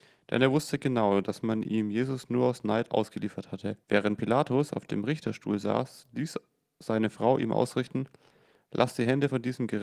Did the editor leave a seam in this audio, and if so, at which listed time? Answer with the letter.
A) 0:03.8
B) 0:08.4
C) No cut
A